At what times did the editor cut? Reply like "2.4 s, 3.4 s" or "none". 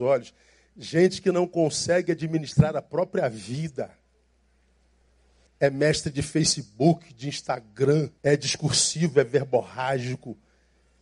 5.5 s, 8.2 s